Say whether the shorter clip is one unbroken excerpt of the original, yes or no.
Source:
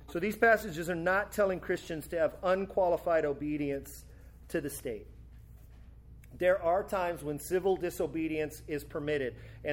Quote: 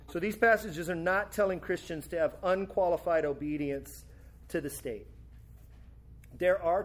yes